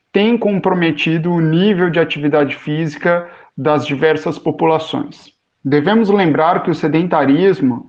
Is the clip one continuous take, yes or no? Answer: no